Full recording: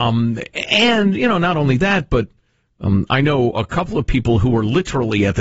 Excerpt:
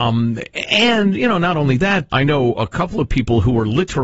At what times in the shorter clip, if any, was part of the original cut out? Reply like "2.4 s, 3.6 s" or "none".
2.1 s